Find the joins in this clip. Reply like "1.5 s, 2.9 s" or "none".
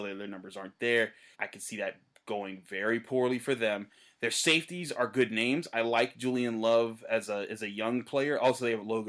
1.3 s